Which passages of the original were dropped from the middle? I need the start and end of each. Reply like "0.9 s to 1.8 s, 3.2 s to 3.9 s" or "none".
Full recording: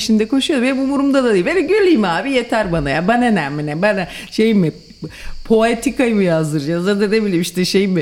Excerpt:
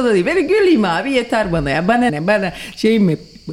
3.3 s to 3.6 s